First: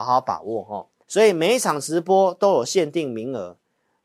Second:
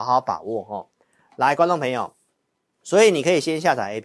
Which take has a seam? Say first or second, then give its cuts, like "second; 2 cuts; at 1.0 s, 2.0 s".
first; 1 cut; at 1.0 s